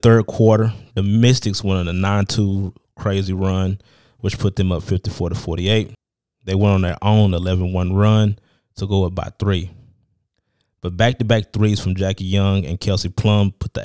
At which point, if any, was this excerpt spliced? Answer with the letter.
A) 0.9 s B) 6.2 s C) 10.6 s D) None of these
B